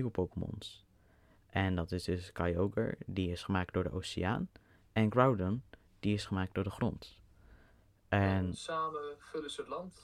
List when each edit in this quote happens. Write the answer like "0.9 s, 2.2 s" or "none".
none